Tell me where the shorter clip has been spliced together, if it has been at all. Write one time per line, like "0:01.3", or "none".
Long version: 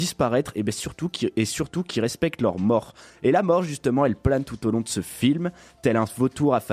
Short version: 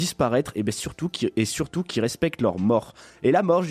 none